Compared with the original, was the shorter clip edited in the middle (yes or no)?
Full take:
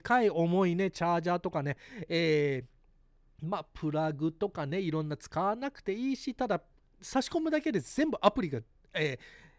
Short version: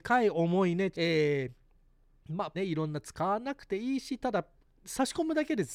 yes